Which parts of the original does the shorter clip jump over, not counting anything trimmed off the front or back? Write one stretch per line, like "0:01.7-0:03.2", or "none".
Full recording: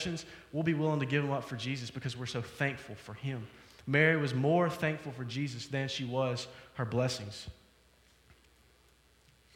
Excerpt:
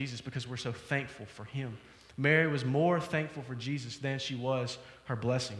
none